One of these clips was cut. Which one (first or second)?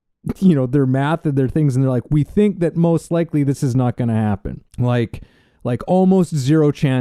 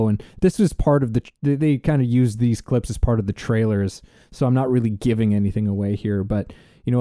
first